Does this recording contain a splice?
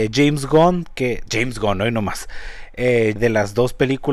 yes; 1 cut; at 3.2 s

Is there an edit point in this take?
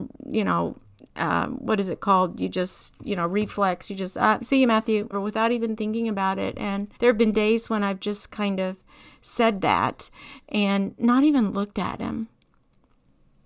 yes; 2 cuts; at 5.1 s, 7.0 s

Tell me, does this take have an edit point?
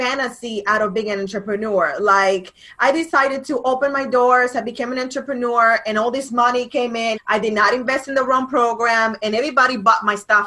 yes; 1 cut; at 7.2 s

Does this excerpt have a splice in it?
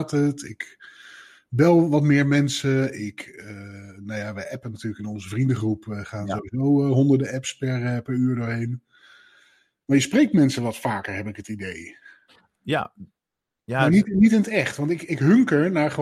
no; 0 cuts

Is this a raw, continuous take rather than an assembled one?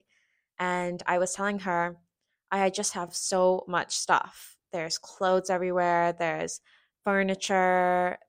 yes; 0 cuts

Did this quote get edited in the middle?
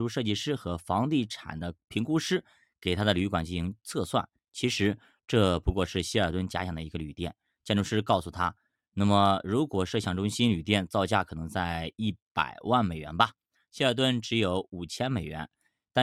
no; 0 cuts

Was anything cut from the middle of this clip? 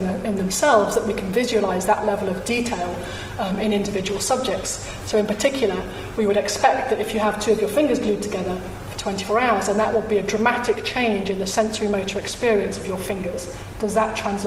yes; 1 cut; at 5.0 s

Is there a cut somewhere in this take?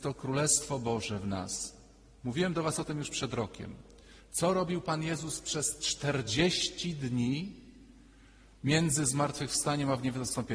no; 0 cuts

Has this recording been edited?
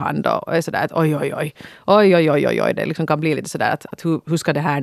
no; 0 cuts

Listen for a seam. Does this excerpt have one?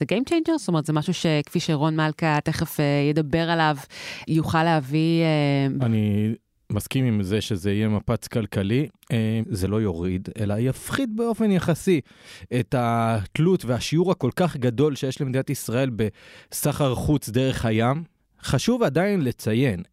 yes; 2 cuts; at 5.8 s, 9.4 s

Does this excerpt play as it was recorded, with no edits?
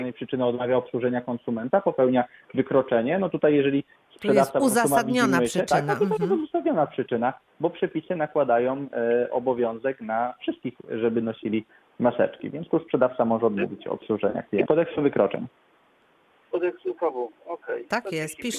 no; 1 cut; at 14.6 s

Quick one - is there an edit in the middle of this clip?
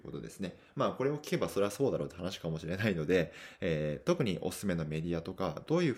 no; 0 cuts

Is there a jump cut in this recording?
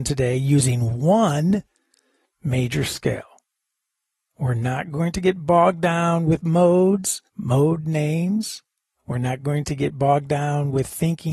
yes; 1 cut; at 7.3 s

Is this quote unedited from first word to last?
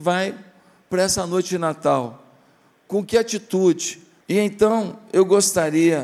no; 1 cut; at 4.2 s

